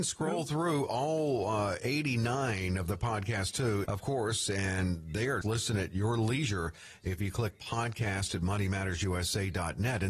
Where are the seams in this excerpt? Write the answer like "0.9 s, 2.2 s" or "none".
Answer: 3.8 s, 5.4 s